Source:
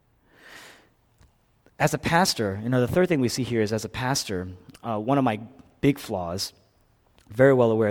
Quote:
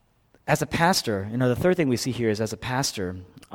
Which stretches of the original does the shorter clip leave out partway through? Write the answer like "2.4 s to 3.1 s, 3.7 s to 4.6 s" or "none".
none